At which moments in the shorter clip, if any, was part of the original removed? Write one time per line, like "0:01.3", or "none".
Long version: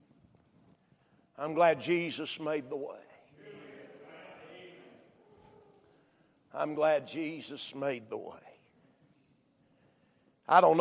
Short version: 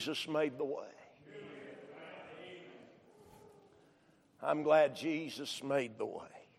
none